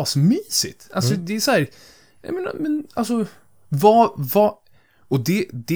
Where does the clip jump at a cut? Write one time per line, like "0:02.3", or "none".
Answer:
none